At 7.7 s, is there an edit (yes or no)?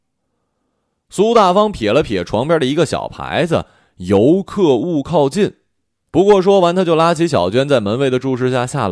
no